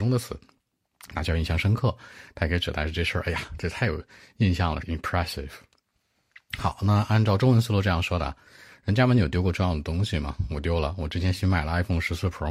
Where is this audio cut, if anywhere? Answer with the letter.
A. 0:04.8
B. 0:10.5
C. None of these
A